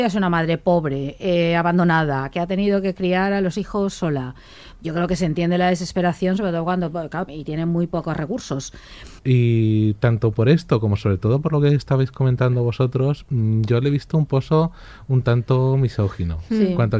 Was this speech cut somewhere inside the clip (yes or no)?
yes